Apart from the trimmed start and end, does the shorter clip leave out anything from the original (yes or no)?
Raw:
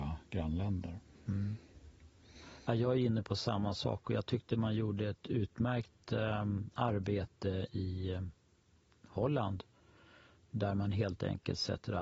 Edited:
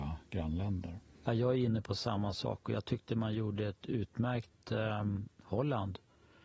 yes